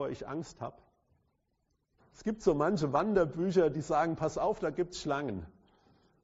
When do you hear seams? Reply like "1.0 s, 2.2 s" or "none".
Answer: 2.0 s